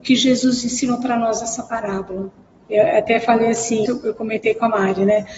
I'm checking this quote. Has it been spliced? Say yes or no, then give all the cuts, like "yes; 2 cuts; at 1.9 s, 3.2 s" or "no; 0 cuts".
yes; 2 cuts; at 2.6 s, 3.9 s